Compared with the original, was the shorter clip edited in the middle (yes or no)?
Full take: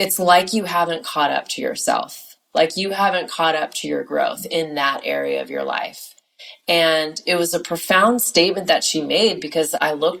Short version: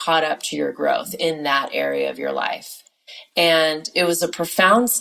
no